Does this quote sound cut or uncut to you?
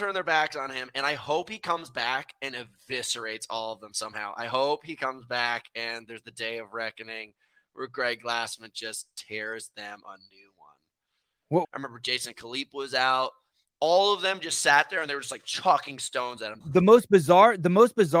cut